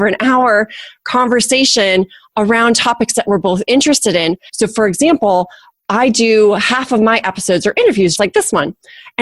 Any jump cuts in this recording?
yes; 2 cuts; at 4.5 s, 8.2 s

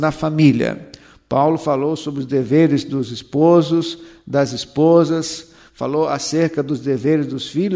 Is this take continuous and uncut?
yes; 0 cuts

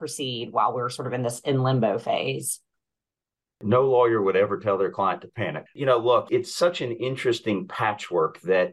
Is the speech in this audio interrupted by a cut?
yes; 1 cut; at 5.7 s

